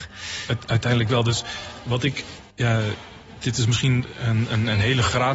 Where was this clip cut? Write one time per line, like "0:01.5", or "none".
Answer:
0:02.5